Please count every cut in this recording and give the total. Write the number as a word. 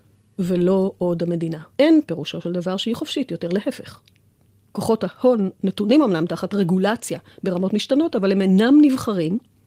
one